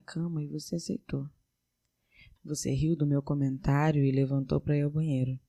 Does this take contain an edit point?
yes; 1 cut; at 2.4 s

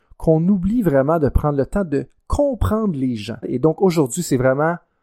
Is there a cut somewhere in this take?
yes; 1 cut; at 3.4 s

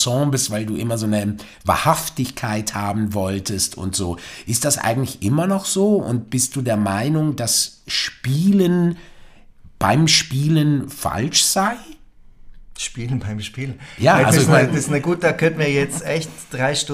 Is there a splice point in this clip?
no; 0 cuts

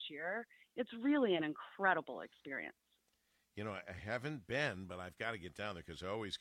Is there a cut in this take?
no; 0 cuts

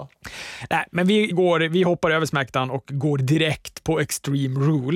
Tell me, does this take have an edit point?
yes; 1 cut; at 1.3 s

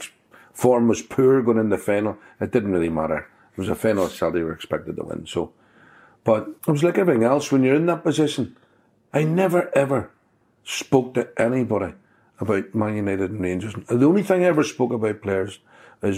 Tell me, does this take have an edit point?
yes; 1 cut; at 6.6 s

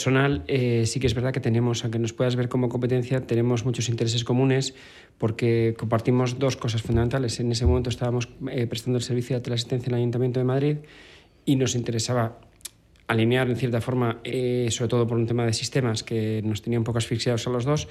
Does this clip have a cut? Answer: no; 0 cuts

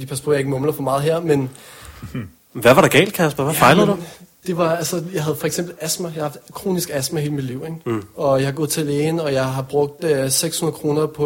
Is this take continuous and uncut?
yes; 0 cuts

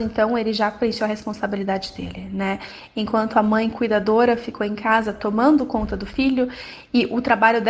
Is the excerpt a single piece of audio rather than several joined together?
yes; 0 cuts

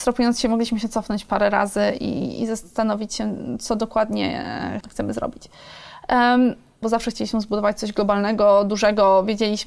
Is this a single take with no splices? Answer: no; 2 cuts; at 4.8 s, 6.8 s

